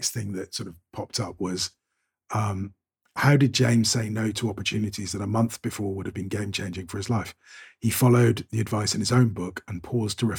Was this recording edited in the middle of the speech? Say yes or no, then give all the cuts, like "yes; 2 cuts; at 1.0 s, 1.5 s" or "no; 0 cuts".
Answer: no; 0 cuts